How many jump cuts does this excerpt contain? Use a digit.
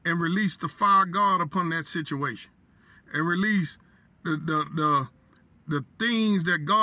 0